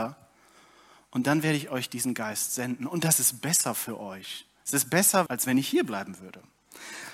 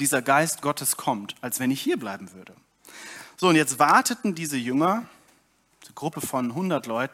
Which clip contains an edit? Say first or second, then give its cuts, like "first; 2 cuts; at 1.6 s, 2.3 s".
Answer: first; 1 cut; at 5.3 s